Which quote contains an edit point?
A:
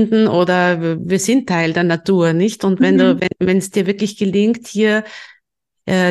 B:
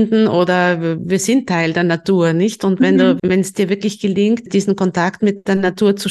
B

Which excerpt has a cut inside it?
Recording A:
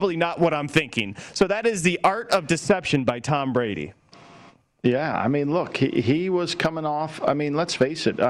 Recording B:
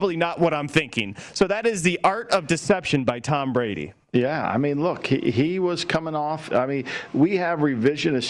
B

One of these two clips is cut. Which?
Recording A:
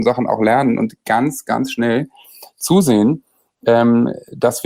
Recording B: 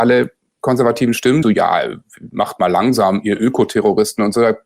B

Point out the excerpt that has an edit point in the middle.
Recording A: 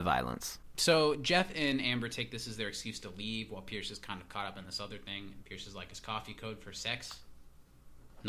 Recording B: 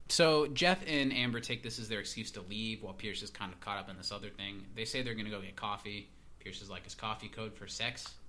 A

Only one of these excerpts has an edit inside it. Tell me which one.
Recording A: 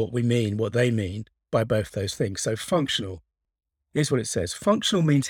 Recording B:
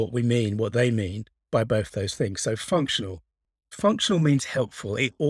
B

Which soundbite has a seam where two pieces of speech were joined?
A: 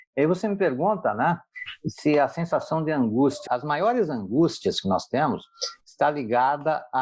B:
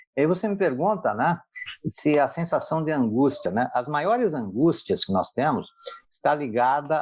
A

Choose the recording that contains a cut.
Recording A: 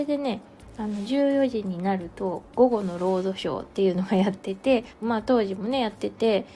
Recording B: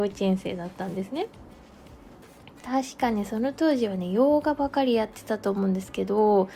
A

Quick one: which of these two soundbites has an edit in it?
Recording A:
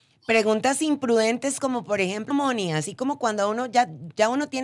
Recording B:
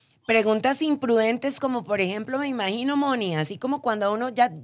A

